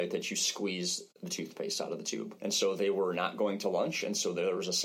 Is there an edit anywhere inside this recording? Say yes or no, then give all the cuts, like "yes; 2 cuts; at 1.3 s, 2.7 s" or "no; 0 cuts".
yes; 1 cut; at 2.4 s